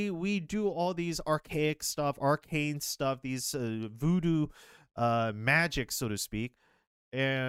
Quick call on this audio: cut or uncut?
uncut